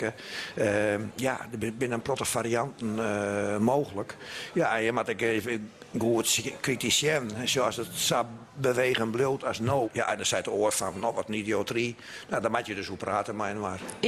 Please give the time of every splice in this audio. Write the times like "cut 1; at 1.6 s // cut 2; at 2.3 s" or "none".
cut 1; at 9.8 s